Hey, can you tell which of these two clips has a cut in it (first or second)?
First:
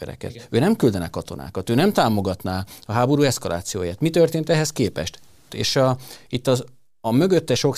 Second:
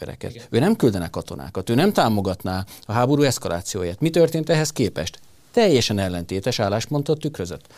first